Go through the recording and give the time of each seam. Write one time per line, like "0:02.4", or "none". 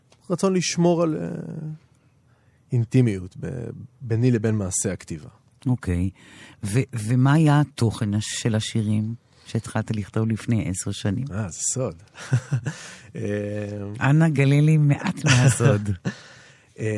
none